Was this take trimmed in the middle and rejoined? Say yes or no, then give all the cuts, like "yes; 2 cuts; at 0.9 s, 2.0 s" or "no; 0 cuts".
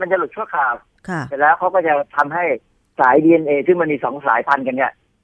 no; 0 cuts